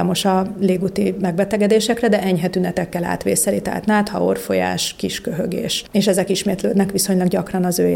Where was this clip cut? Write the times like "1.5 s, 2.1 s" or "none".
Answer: none